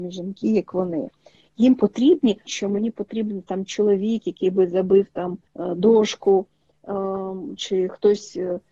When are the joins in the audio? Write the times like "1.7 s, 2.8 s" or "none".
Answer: 2.5 s, 5.5 s, 7.6 s